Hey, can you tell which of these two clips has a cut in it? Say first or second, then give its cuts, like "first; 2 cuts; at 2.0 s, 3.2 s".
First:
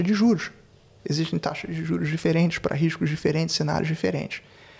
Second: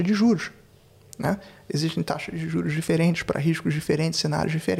first; 1 cut; at 1.0 s